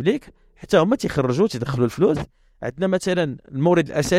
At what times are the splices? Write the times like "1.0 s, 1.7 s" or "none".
none